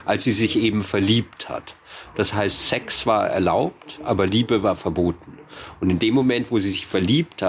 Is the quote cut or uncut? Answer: cut